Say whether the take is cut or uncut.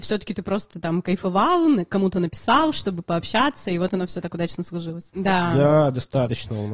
cut